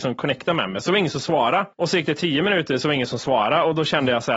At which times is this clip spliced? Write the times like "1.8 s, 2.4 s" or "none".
1.7 s